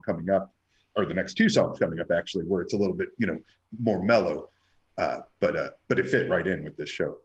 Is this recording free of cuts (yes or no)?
yes